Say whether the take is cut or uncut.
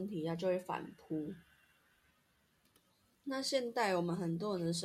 uncut